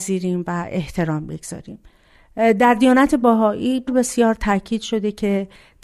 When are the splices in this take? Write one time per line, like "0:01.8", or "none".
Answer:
0:03.9

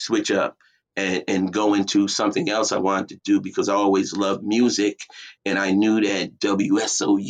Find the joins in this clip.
none

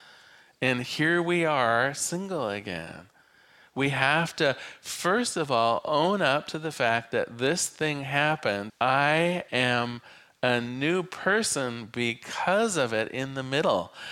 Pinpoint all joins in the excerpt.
0:08.7

